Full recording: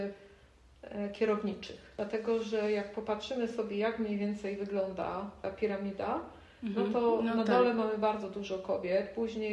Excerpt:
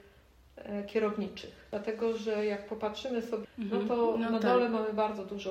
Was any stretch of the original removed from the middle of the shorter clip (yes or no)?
yes